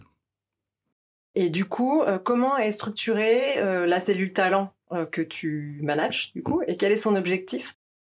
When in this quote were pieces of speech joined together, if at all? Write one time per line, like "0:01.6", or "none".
none